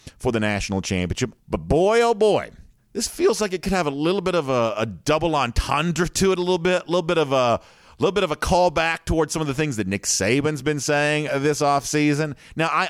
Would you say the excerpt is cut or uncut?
cut